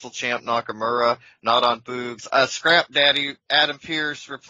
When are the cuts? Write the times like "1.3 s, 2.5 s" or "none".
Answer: 2.3 s